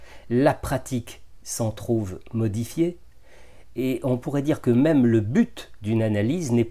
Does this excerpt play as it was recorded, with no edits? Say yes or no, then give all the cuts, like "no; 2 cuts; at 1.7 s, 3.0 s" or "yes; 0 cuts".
yes; 0 cuts